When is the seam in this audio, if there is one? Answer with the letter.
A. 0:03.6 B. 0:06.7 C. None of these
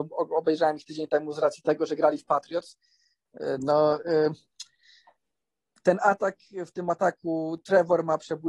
A